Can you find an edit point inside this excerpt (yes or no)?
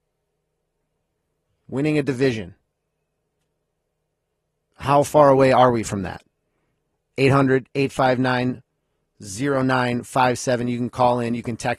no